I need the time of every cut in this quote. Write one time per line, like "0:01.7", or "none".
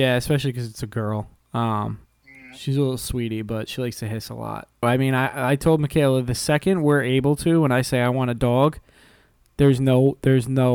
0:04.8